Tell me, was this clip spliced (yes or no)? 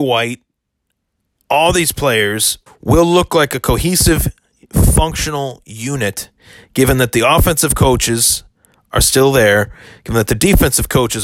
yes